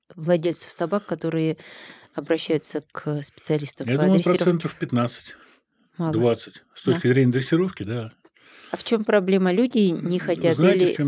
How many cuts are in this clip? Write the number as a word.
zero